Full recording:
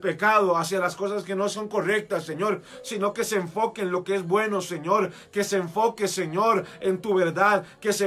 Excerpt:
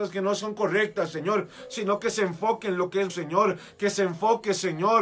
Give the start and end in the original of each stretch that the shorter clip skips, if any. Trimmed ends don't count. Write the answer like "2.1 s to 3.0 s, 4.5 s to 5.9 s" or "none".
4.2 s to 4.6 s